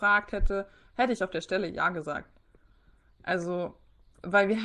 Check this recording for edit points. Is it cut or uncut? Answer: uncut